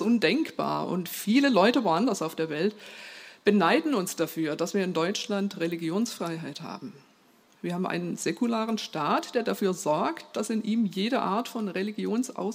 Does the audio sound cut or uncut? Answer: uncut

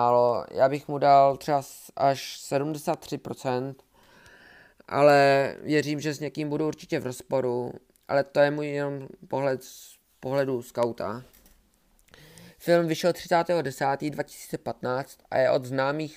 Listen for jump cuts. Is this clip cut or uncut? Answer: uncut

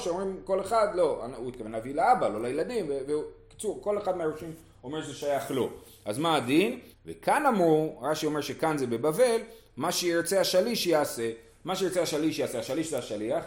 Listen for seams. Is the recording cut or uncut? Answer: cut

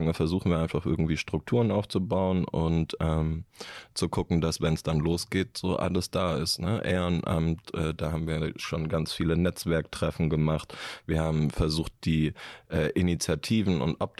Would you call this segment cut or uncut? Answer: uncut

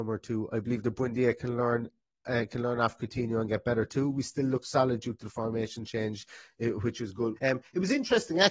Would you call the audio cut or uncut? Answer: cut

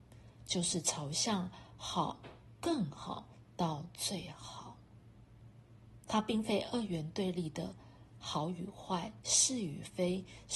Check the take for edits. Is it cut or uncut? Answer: uncut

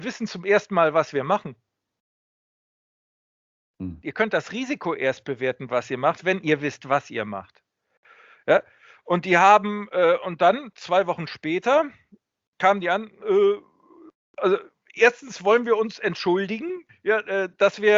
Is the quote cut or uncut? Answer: cut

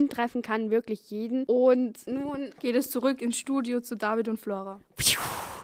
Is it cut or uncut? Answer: uncut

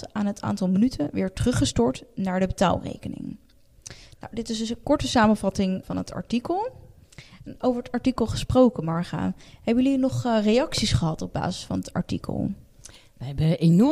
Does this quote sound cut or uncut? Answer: cut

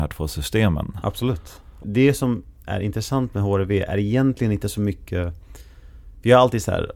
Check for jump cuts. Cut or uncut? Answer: cut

